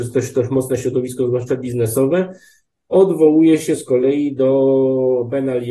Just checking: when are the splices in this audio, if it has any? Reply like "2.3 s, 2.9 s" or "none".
none